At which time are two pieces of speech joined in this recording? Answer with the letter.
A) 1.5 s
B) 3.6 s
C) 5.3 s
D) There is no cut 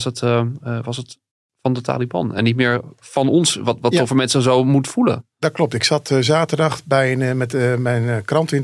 D